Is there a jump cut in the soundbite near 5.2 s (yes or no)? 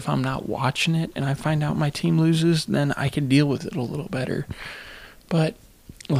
no